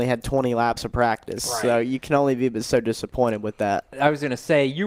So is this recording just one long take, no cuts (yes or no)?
yes